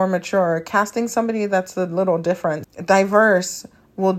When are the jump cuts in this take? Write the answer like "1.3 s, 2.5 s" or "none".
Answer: 2.6 s